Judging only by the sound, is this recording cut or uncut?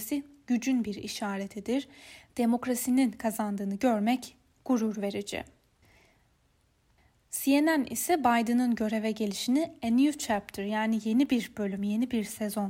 uncut